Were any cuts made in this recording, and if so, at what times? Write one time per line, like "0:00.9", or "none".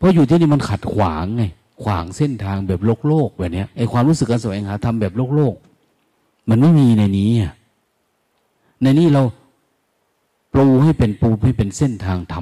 0:03.7